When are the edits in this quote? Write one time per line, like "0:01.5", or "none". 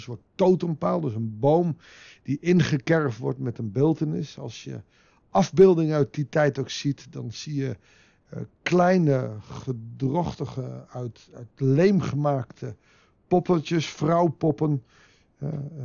none